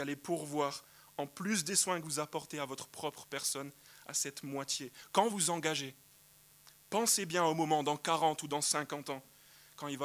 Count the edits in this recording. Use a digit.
1